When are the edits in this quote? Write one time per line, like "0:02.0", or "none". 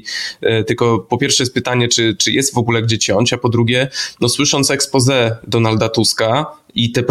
none